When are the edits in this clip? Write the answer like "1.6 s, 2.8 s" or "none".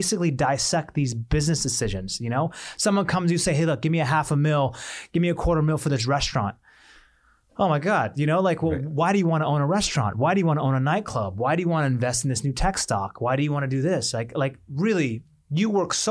none

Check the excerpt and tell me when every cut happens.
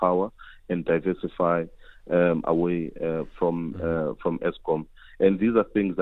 none

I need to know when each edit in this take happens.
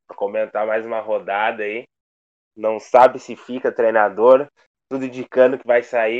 2.5 s

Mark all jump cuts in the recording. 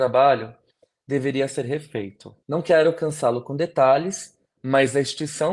2.4 s

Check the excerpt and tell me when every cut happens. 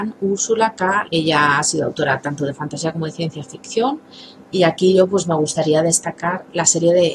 1.1 s

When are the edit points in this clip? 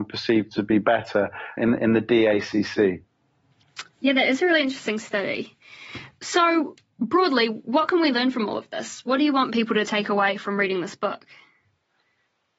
1.6 s

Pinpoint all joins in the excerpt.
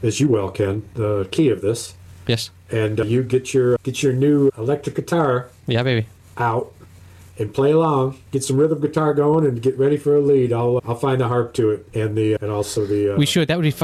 8.3 s

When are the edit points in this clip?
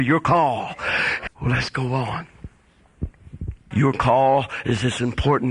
1.3 s, 3.7 s

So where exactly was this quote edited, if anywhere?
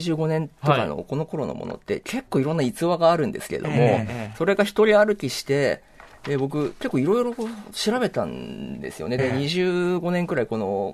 none

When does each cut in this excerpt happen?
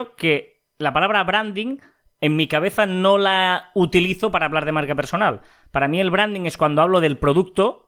none

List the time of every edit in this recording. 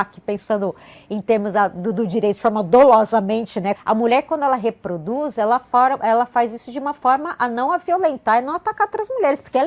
3.7 s

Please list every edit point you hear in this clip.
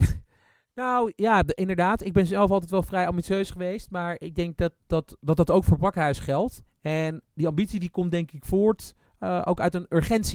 4.8 s

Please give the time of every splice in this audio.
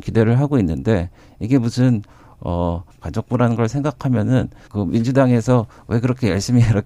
2.9 s, 4.7 s

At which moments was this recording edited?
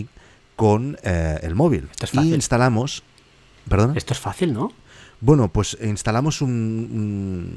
1.9 s

